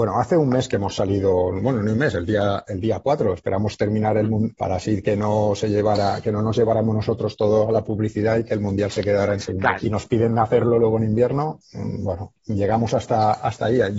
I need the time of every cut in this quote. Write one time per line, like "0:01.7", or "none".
0:04.5
0:09.8